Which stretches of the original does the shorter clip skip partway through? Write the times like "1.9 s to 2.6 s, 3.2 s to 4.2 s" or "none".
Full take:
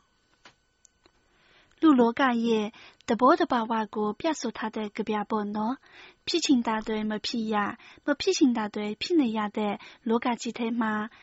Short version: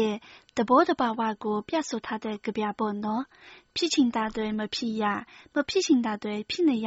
none